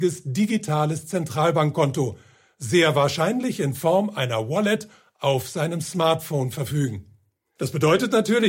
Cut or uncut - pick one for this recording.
cut